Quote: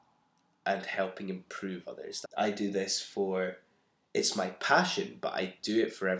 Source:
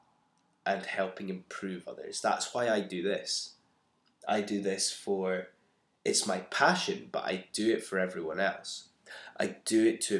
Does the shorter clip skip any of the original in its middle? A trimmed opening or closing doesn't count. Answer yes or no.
yes